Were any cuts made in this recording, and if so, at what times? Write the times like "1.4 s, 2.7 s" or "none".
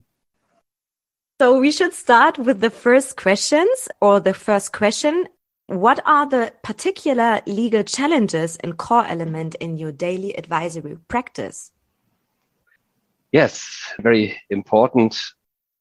14.0 s

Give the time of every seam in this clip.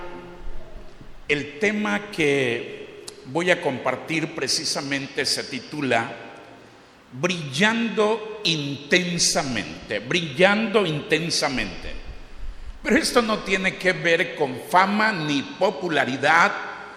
none

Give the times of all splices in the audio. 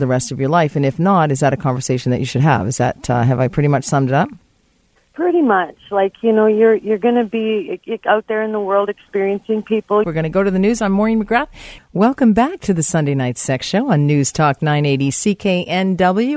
10.0 s, 11.8 s

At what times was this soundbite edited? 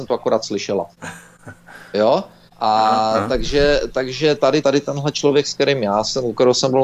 4.6 s

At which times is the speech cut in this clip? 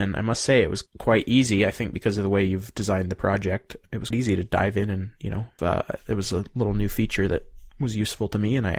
4.1 s, 5.6 s

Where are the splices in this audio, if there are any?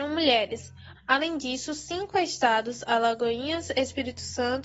0.9 s

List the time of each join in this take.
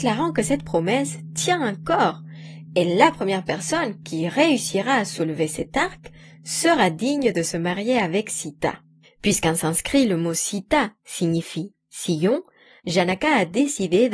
9.0 s, 12.8 s

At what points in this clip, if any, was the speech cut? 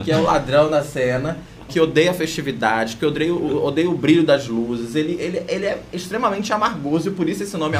1.7 s

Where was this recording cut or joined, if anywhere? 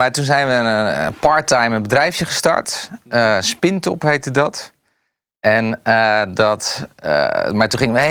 none

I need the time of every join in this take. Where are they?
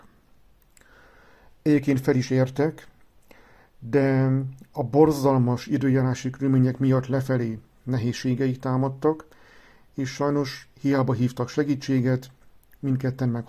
1.5 s

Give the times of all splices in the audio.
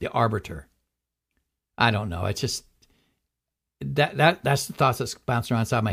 none

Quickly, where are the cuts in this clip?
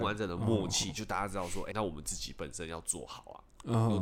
1.7 s

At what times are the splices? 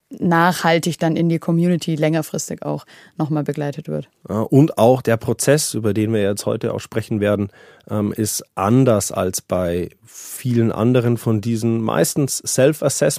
4.2 s

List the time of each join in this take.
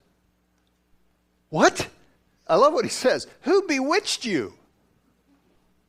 2.4 s

